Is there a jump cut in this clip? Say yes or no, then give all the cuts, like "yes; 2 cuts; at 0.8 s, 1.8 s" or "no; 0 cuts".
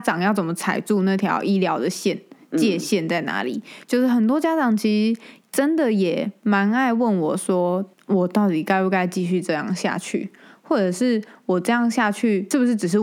no; 0 cuts